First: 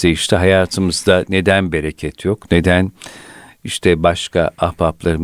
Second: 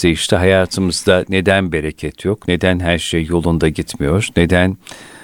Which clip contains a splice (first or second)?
first